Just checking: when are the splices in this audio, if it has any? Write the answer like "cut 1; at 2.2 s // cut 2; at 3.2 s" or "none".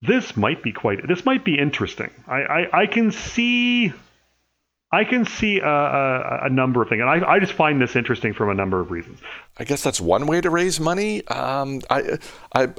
cut 1; at 9.4 s